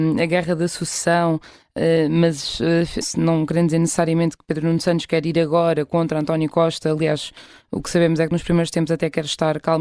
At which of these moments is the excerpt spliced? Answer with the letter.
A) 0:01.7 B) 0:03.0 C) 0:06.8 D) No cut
B